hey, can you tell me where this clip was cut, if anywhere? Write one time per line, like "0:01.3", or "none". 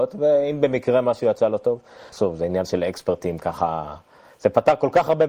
0:02.1